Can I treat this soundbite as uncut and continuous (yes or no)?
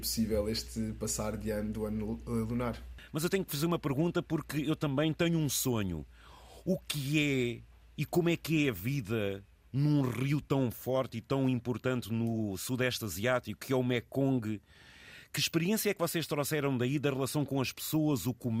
yes